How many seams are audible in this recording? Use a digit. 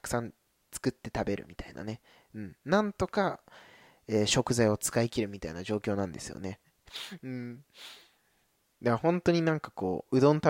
1